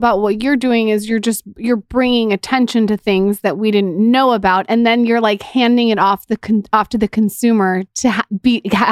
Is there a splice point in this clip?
no; 0 cuts

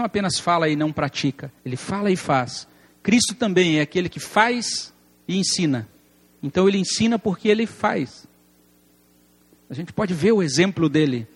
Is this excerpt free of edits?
no; 1 cut; at 1.6 s

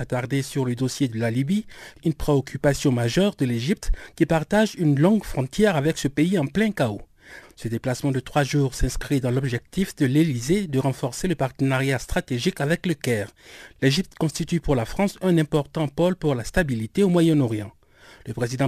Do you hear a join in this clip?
yes; 1 cut; at 7.4 s

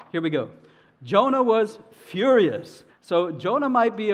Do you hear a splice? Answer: yes; 1 cut; at 2.9 s

